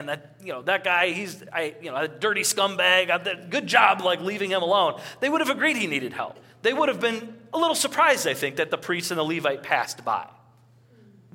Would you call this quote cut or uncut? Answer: uncut